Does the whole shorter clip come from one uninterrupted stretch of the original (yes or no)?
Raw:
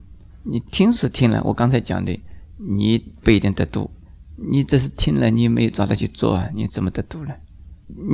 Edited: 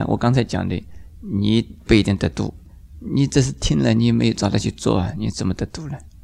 yes